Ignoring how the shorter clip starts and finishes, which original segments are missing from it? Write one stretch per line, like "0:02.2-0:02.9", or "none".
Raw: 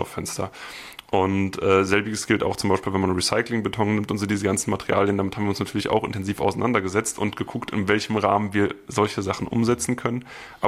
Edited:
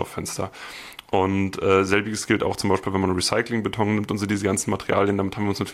none